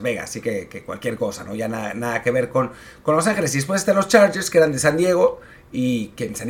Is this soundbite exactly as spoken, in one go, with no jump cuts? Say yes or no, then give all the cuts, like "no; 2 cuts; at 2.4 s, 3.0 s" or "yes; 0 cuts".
yes; 0 cuts